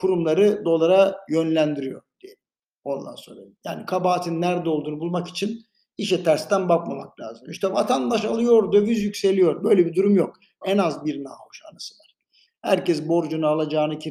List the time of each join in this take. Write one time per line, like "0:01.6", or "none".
0:10.6
0:12.5